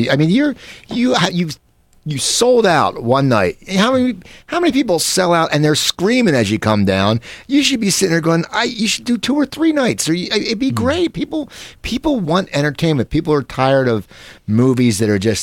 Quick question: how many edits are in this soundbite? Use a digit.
0